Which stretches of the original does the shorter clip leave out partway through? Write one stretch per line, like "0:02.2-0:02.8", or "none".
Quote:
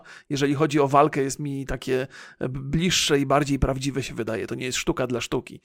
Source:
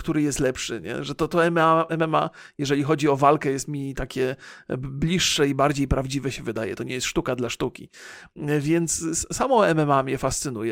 none